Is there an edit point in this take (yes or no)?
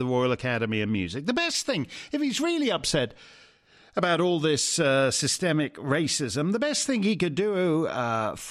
no